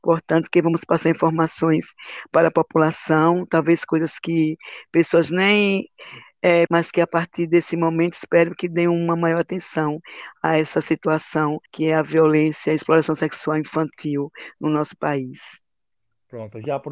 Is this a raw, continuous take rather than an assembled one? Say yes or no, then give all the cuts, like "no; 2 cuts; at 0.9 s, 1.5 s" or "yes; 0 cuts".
no; 2 cuts; at 6.7 s, 11.7 s